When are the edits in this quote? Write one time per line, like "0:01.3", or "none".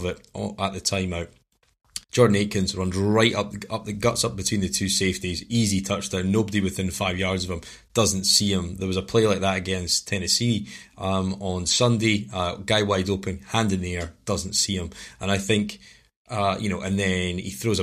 0:02.0

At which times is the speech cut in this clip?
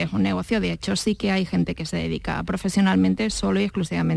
none

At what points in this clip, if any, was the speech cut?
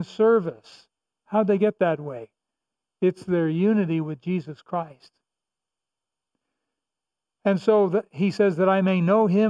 0:01.2

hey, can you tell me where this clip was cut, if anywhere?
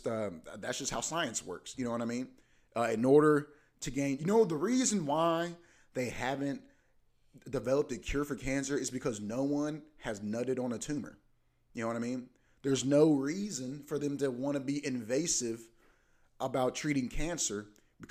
none

